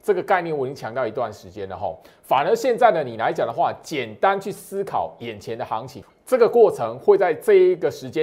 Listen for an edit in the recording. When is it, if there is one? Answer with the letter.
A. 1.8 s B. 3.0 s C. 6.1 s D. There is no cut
C